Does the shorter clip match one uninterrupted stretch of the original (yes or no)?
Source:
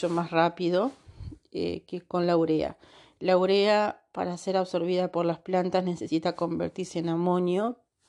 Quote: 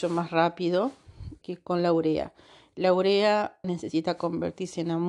no